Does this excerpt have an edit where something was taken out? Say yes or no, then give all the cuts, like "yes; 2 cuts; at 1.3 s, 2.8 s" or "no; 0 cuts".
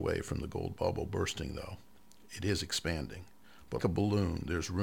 yes; 1 cut; at 3.8 s